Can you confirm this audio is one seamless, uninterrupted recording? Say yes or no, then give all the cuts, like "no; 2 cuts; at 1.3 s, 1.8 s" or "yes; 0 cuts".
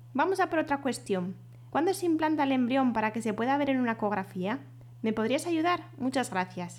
no; 1 cut; at 1.7 s